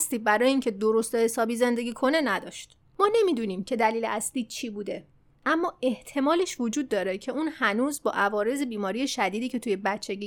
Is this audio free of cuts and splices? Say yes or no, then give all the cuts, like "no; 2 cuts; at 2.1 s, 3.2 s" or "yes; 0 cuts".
no; 1 cut; at 2.8 s